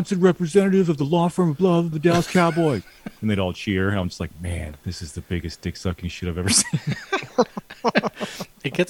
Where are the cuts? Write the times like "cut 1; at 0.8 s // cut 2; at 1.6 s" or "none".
cut 1; at 1.9 s